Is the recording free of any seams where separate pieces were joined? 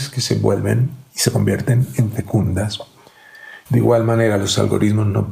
no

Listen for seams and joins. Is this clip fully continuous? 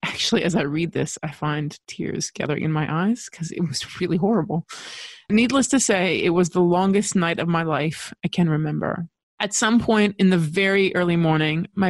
yes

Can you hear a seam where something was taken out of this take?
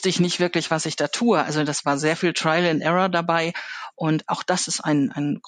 yes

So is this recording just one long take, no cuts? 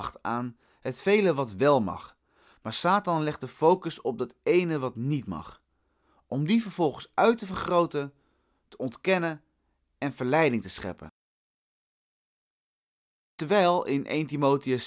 yes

